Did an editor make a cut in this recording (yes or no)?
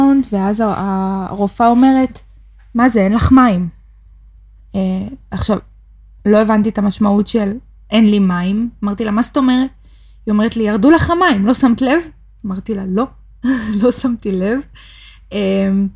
no